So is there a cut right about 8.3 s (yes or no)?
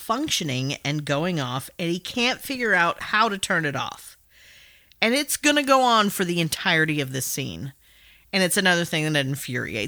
no